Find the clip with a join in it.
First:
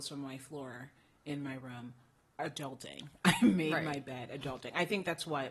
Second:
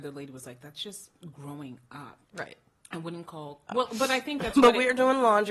second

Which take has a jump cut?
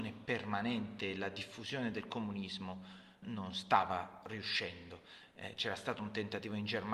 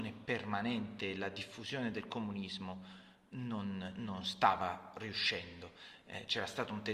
first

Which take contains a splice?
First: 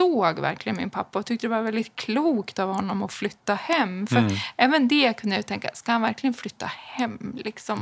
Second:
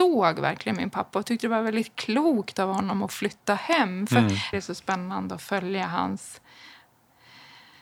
second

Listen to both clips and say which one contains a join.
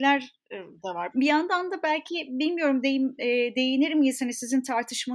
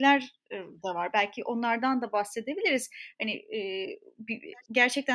first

